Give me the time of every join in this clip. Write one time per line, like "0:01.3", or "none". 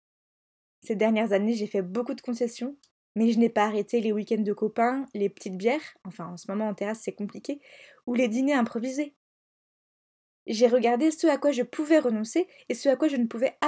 none